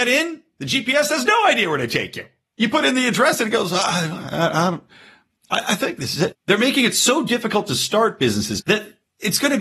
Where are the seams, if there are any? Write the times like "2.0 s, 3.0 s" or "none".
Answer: 6.3 s, 8.6 s